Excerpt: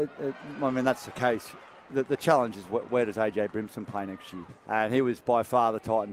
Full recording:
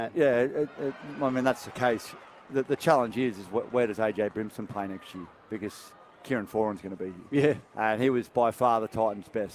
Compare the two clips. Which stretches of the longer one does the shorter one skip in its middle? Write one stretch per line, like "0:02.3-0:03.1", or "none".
0:03.1-0:03.3
0:05.3-0:07.6

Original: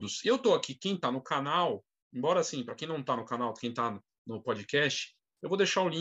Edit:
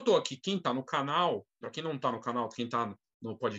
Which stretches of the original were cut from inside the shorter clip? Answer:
0:02.0-0:02.7

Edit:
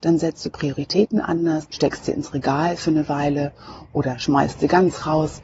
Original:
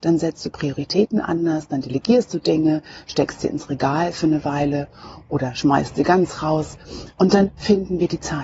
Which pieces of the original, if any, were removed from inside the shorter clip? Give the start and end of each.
0:01.7-0:03.0

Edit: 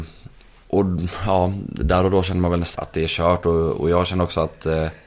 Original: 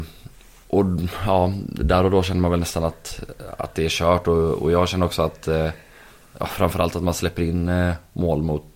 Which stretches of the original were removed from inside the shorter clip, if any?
0:02.8-0:03.6

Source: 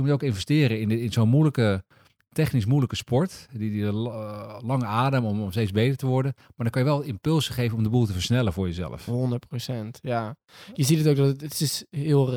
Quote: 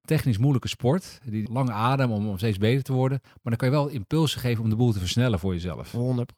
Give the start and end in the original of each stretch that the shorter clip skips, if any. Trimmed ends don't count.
0:03.7-0:04.6

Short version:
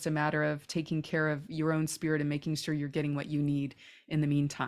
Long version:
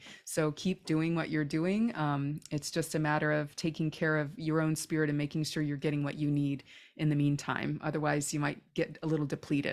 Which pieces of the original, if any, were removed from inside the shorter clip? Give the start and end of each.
none

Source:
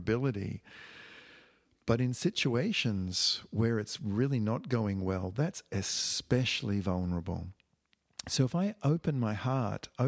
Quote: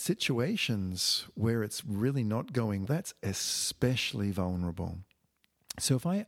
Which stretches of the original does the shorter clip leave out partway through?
0:05.0-0:05.3

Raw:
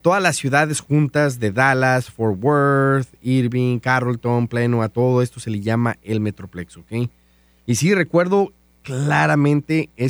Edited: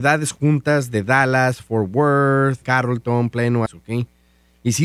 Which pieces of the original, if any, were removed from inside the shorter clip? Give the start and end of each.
0:03.1-0:03.8
0:04.8-0:06.7

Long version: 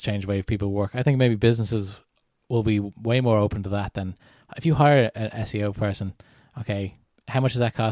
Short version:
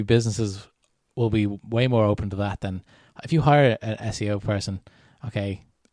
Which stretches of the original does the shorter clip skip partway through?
none

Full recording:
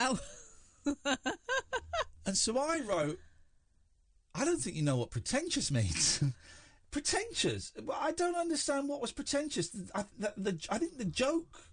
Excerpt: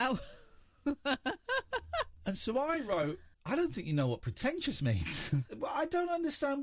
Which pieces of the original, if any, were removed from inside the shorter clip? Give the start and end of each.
0:03.3-0:04.2
0:06.4-0:07.7

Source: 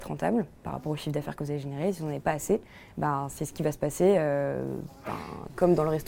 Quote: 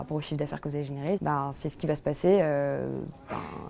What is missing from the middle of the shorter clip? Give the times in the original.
0:01.9-0:02.9

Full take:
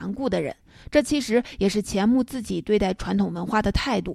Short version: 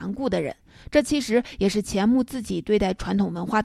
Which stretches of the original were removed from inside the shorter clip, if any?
none

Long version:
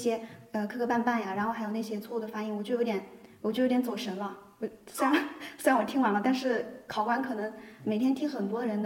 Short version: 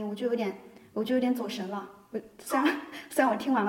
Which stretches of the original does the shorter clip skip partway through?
none

